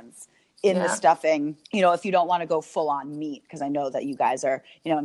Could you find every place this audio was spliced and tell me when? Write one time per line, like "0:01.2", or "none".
0:01.6